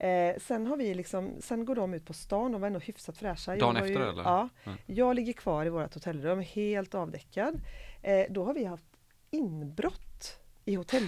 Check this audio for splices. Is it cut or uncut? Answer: uncut